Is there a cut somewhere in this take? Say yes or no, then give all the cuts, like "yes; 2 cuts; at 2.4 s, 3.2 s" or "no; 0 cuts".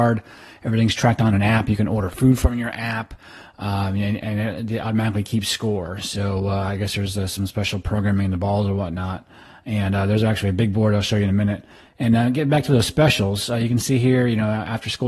no; 0 cuts